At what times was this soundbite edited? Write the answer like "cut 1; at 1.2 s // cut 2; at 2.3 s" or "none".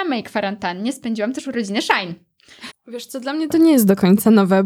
cut 1; at 2.7 s